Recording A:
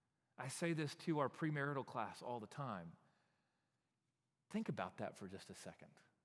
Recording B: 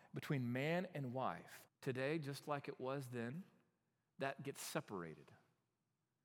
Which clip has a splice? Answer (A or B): B